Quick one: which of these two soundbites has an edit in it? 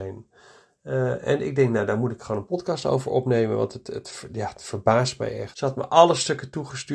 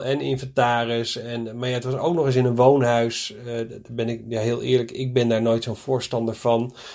first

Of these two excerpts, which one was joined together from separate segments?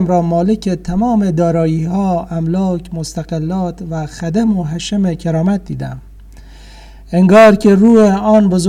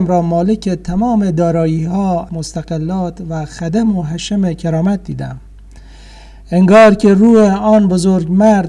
second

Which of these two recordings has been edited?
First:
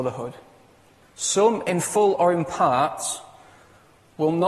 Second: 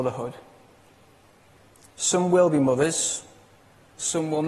first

